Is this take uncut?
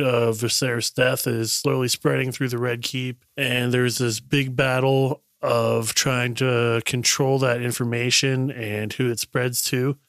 yes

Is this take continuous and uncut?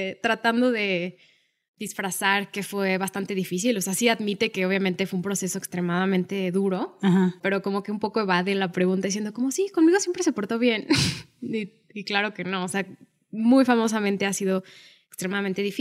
yes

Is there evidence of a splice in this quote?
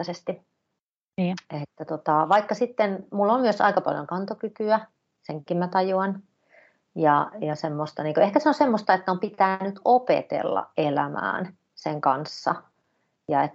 no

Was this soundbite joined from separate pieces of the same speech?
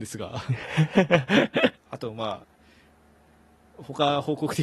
yes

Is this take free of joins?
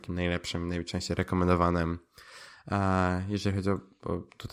yes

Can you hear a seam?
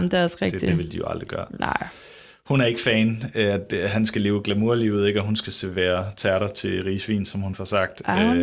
no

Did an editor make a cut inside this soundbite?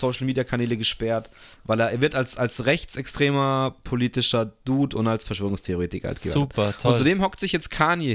no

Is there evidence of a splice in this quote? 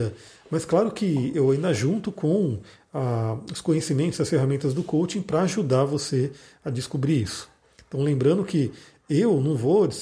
no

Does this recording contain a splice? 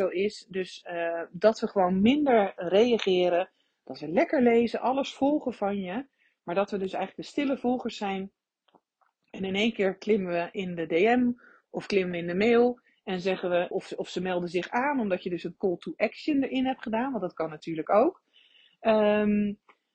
yes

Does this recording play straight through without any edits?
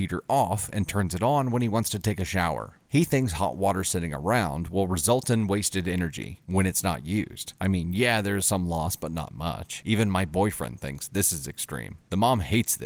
yes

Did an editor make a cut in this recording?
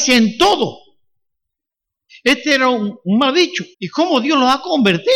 yes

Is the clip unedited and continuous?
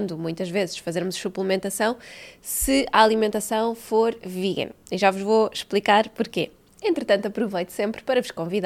yes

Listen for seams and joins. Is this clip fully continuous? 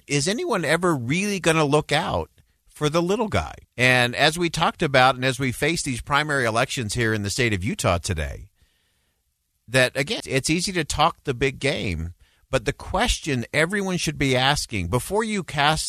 no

